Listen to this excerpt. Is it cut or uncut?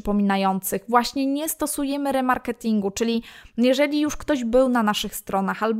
uncut